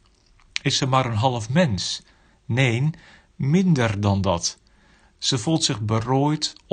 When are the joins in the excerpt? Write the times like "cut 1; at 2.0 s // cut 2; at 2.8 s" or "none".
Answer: none

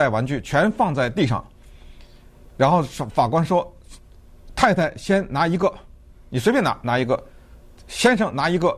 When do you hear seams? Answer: none

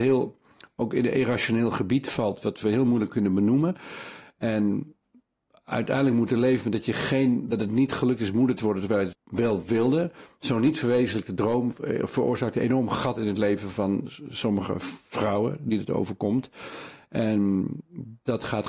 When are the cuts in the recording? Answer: cut 1; at 9.1 s

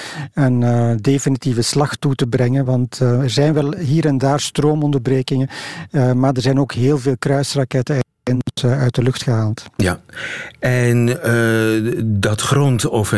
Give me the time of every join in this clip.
none

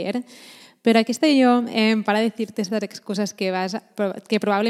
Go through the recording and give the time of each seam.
none

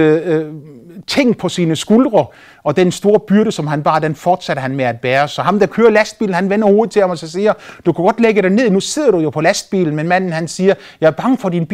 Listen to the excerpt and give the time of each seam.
none

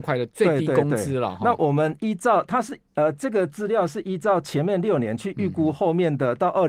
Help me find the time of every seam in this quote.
none

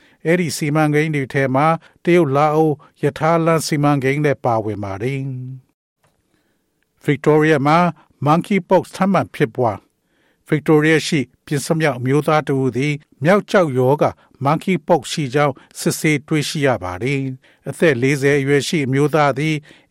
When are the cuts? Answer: cut 1; at 11.7 s

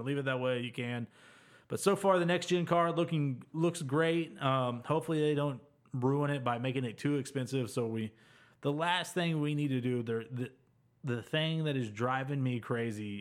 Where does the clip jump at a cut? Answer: none

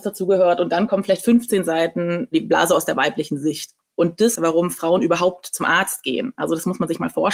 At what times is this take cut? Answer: cut 1; at 4.3 s

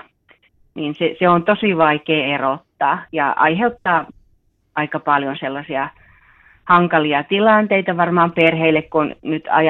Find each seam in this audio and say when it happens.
none

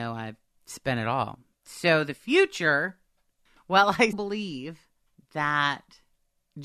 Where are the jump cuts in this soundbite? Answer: cut 1; at 4.1 s

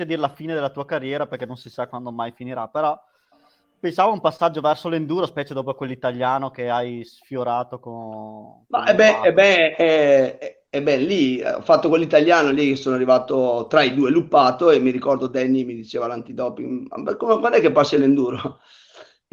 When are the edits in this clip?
none

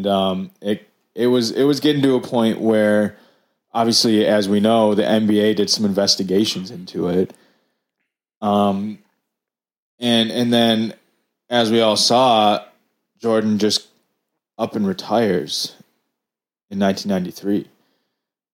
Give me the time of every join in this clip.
none

